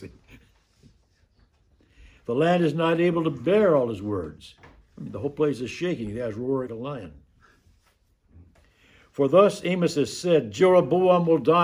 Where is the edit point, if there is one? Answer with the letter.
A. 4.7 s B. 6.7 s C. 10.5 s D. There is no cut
B